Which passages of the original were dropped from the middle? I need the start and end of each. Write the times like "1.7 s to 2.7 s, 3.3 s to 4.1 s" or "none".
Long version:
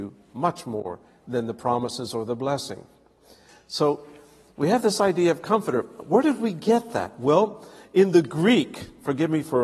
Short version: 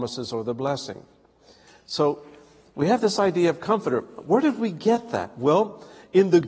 none